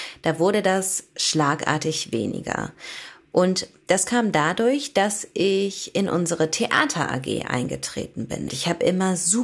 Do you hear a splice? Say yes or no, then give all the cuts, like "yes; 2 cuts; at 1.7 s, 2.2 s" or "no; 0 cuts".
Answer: yes; 1 cut; at 8.5 s